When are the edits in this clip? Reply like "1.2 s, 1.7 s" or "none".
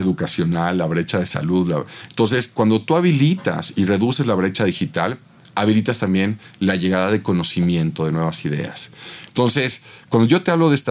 9.3 s